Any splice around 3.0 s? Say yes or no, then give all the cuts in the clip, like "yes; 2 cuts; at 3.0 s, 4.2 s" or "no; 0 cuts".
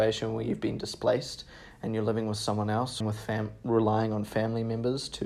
yes; 1 cut; at 3.0 s